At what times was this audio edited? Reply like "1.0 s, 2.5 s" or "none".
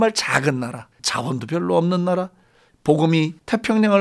0.9 s